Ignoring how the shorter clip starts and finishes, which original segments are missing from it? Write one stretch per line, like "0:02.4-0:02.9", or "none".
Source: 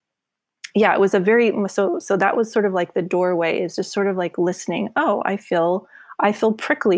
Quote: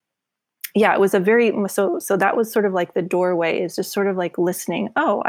none